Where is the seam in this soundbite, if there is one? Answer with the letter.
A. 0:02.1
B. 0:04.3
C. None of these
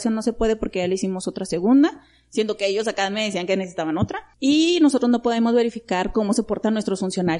B